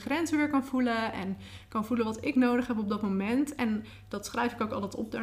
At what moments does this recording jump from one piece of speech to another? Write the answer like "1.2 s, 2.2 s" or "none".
none

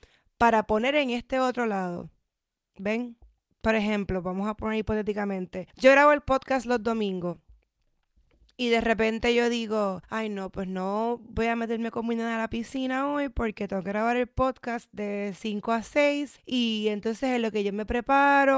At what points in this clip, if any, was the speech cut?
none

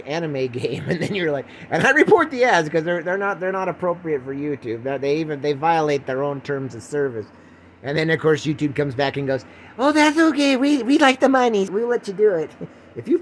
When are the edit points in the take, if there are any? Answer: 11.7 s

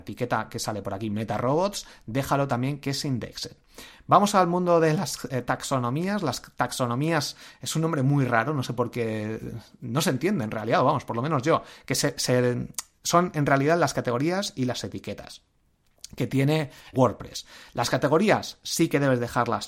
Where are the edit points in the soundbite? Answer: 16.9 s

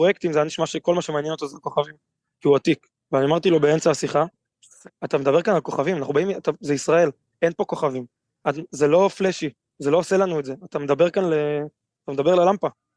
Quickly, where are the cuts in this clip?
none

